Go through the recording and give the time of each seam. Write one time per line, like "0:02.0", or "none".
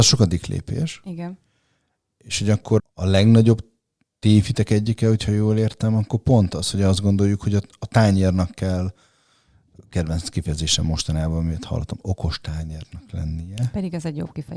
0:02.8